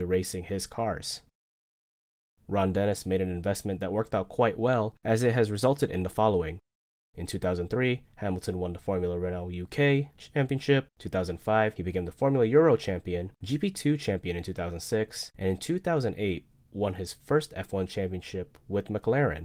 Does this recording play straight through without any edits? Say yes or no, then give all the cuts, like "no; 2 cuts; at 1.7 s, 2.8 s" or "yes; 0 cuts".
yes; 0 cuts